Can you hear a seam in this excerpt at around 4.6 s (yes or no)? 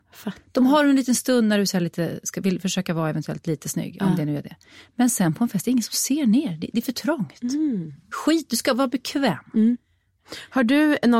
no